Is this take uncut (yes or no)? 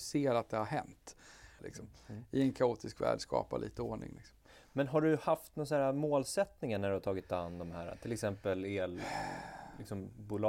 no